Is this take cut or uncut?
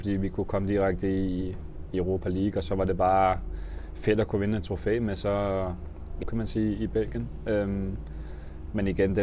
cut